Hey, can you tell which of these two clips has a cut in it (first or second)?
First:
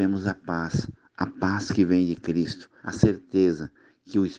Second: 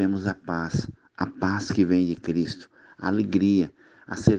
first